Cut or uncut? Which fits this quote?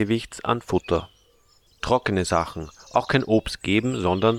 cut